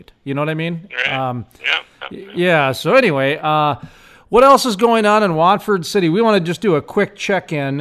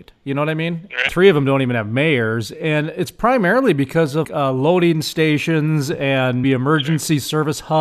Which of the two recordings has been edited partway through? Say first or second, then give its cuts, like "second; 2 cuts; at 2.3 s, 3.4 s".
second; 3 cuts; at 1.1 s, 4.2 s, 6.4 s